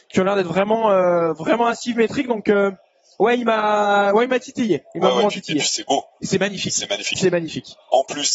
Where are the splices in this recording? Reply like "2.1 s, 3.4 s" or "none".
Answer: none